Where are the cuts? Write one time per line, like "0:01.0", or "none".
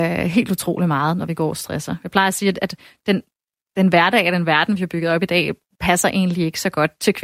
none

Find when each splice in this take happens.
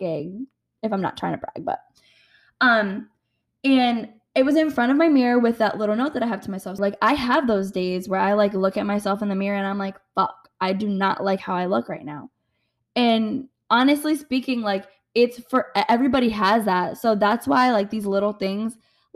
0:06.8

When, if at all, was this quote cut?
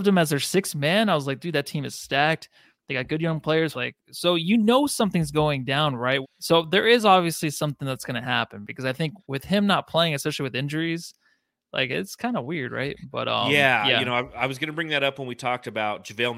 0:03.7
0:06.2

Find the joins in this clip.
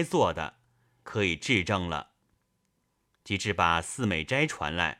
0:01.0

